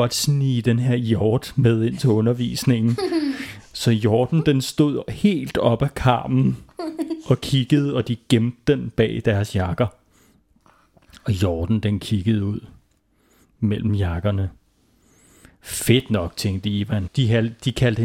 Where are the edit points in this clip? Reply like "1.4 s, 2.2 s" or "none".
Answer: 15.4 s, 17.1 s